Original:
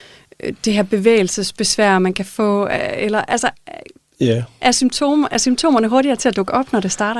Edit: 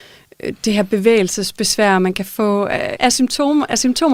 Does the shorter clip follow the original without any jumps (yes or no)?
no